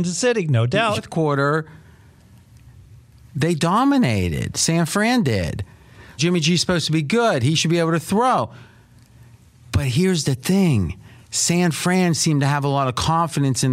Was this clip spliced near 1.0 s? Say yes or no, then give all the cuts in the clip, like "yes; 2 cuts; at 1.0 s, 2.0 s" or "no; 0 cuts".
yes; 2 cuts; at 1.0 s, 6.2 s